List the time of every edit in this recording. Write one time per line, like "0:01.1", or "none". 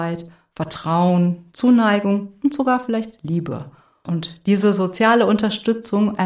0:04.0